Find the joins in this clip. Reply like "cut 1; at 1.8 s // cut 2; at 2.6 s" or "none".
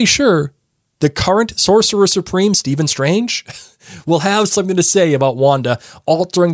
none